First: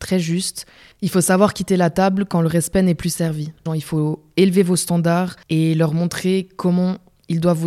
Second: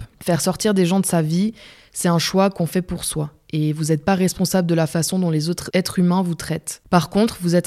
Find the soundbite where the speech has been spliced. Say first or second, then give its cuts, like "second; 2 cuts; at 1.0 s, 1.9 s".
first; 1 cut; at 3.7 s